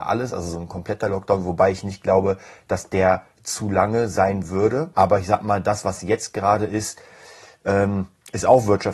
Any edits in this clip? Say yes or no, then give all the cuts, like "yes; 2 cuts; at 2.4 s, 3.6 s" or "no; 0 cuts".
yes; 1 cut; at 4.9 s